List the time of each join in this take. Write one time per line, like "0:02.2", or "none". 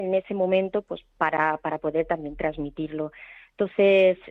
none